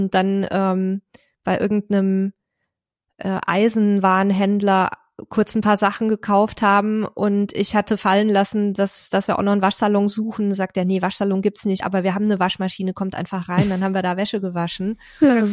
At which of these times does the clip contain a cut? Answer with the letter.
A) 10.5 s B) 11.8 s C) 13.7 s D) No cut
D